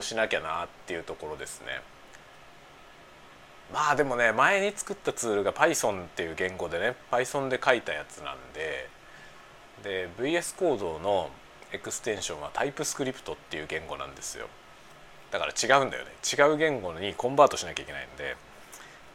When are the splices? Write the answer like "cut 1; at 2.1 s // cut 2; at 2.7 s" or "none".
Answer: cut 1; at 9.7 s